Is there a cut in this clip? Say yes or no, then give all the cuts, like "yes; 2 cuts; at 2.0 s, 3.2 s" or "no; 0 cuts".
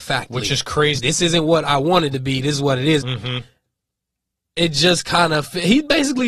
yes; 2 cuts; at 1.0 s, 3.0 s